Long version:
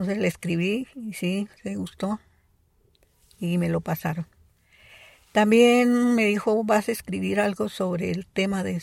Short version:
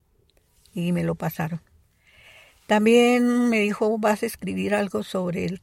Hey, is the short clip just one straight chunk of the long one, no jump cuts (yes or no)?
yes